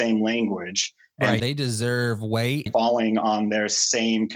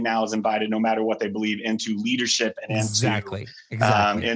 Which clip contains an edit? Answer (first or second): first